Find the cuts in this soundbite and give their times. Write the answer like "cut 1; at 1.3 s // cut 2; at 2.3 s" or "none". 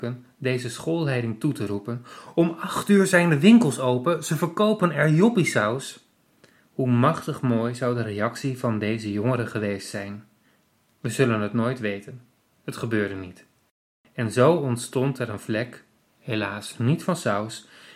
none